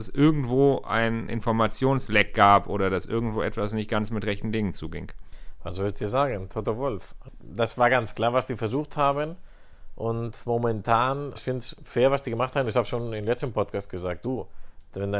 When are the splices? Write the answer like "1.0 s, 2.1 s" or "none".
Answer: 11.4 s